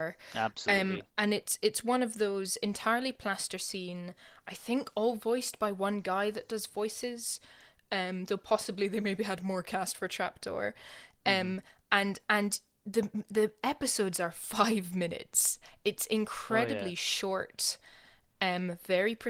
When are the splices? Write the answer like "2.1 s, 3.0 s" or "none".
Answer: 1.1 s